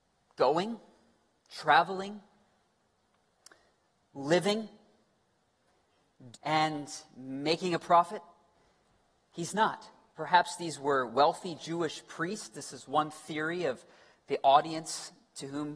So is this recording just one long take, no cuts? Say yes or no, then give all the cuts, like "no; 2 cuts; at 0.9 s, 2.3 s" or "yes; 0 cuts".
no; 2 cuts; at 6.3 s, 10.2 s